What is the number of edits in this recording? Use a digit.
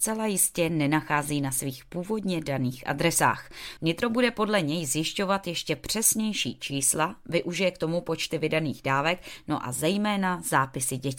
1